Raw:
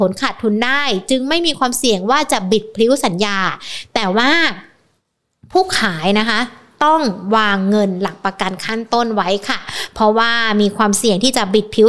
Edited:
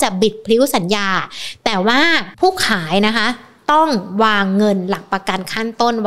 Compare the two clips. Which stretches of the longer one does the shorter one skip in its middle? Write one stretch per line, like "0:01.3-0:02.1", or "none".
0:04.6-0:05.5